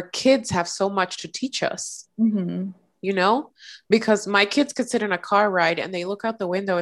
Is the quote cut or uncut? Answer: uncut